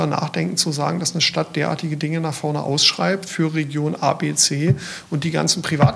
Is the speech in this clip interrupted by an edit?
no; 0 cuts

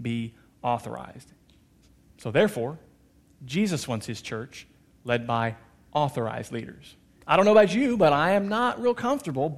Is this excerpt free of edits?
no; 1 cut; at 7.2 s

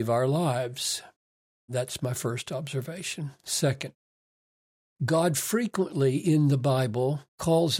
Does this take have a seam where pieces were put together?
yes; 1 cut; at 1.7 s

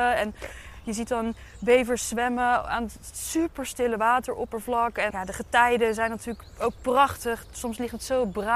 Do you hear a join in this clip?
yes; 1 cut; at 5.1 s

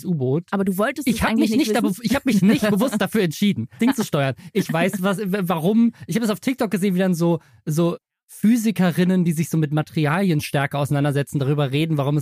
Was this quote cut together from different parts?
yes; 1 cut; at 3.8 s

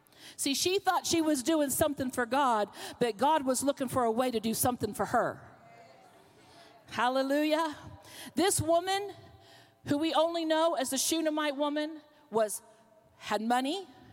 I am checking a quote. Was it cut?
no; 0 cuts

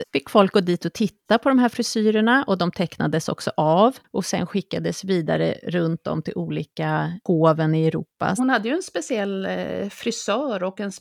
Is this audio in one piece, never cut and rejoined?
no; 1 cut; at 8.4 s

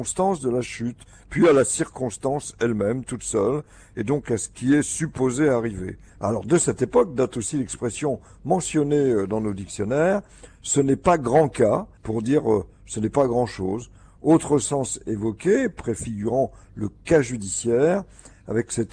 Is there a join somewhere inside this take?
yes; 2 cuts; at 6.1 s, 12.0 s

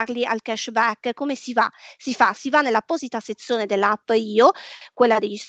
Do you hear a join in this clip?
no; 0 cuts

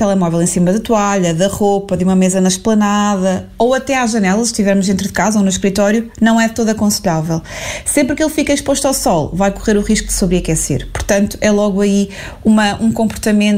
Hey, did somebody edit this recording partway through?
no; 0 cuts

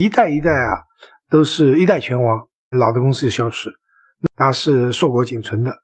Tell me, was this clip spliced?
yes; 1 cut; at 2.7 s

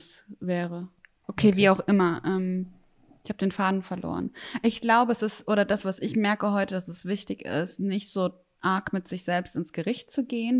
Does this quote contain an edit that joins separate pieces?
no; 0 cuts

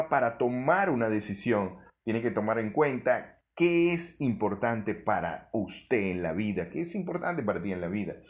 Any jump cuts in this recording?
yes; 1 cut; at 6.7 s

